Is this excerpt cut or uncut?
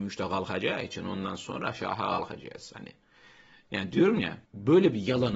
cut